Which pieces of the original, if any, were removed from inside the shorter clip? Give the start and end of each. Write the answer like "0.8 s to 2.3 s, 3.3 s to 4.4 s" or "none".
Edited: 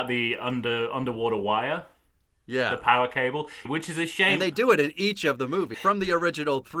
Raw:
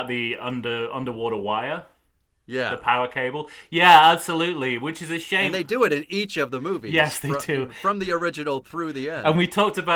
3.7 s to 4.8 s, 6.9 s to 7.7 s

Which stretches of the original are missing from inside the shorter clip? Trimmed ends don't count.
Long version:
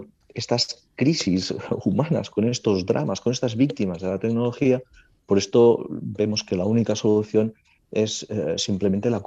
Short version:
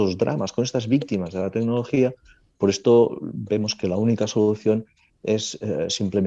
none

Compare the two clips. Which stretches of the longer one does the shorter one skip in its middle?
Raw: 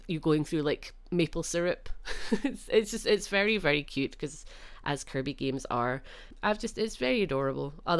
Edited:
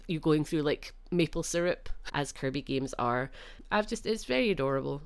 2.1 s to 4.8 s

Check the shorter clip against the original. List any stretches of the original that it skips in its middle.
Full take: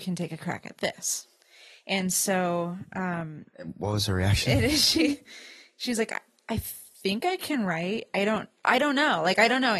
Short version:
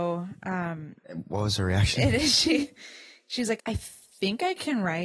6.1 s to 6.4 s

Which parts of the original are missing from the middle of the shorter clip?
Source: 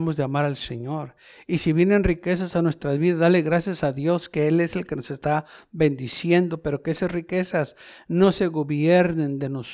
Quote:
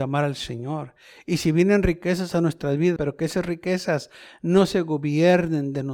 3.2 s to 6.6 s

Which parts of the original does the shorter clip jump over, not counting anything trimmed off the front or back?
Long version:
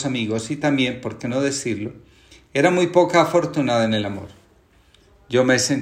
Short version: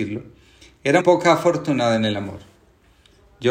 2.7 s to 2.9 s

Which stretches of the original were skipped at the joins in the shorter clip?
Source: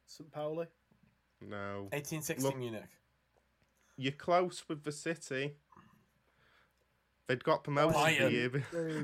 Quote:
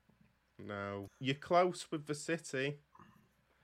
1.9 s to 3.9 s

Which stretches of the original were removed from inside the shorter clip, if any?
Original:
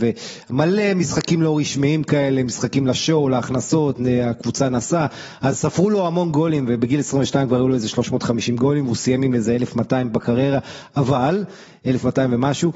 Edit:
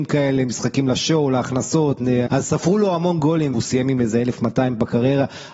4.2 s to 5.4 s, 6.7 s to 8.9 s

